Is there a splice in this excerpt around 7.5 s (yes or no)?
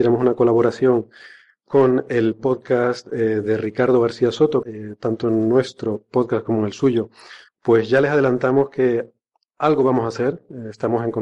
yes